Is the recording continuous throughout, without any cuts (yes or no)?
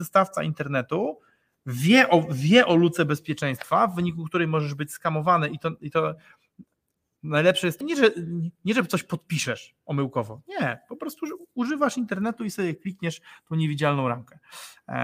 no